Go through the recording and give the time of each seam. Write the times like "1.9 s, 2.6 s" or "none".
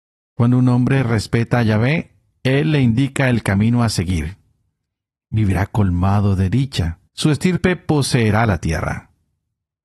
7.1 s